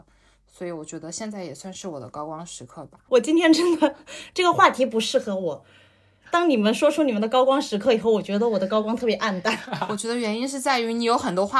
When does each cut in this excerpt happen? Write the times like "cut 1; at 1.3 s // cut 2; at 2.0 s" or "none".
cut 1; at 3.1 s // cut 2; at 6.2 s